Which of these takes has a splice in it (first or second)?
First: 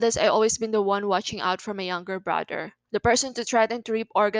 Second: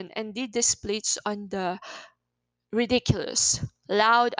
first